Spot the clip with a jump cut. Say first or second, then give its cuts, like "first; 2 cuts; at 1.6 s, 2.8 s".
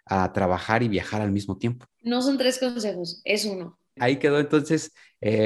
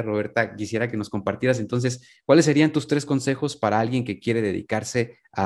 first; 2 cuts; at 1.9 s, 4.0 s